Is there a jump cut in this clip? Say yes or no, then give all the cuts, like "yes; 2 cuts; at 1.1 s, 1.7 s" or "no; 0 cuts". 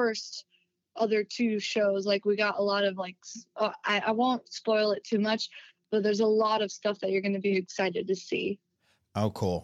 no; 0 cuts